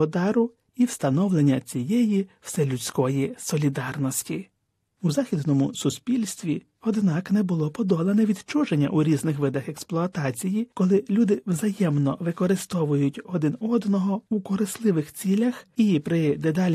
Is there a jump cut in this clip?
yes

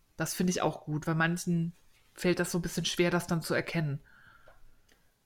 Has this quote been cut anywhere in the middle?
no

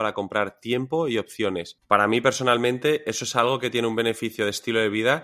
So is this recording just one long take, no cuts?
yes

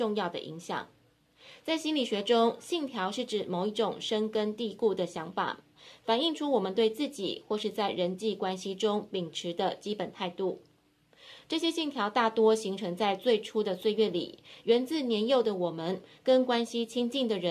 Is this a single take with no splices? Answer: yes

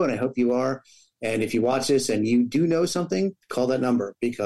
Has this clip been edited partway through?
yes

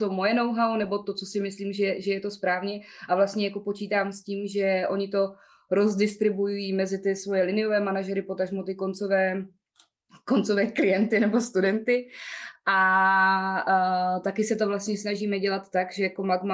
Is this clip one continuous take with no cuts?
no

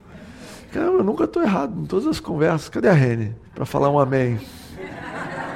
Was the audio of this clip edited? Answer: yes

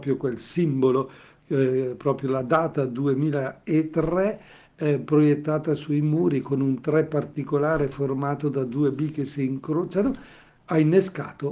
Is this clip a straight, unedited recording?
yes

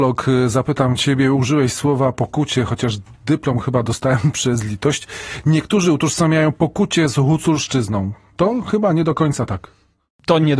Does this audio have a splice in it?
no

